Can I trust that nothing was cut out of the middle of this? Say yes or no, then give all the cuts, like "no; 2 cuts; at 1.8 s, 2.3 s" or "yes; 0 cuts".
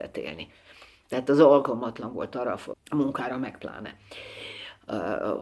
no; 2 cuts; at 1.0 s, 2.7 s